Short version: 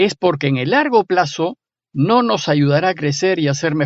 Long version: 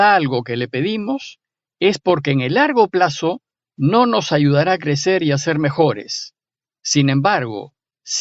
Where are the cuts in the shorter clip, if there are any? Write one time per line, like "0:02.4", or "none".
none